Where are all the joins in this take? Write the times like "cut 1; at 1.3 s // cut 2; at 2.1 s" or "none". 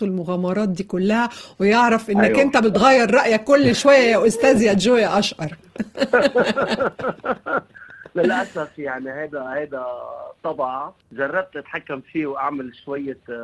cut 1; at 11.0 s